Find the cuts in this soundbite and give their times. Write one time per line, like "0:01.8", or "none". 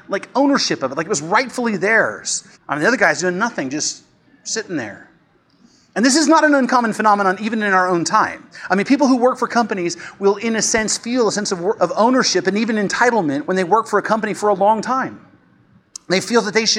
0:02.5
0:11.8
0:13.4